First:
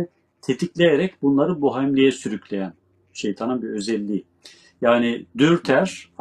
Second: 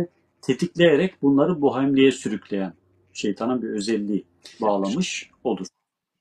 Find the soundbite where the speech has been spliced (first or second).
second